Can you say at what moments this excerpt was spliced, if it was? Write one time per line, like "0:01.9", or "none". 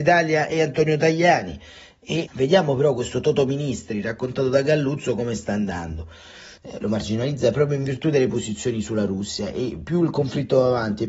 0:06.6

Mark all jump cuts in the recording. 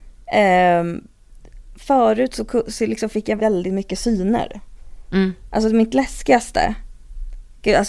0:03.4
0:05.5

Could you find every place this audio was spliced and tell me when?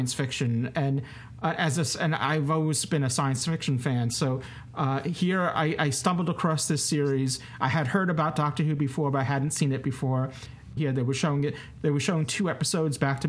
0:10.8

